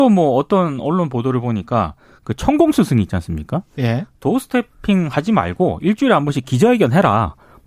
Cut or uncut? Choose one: cut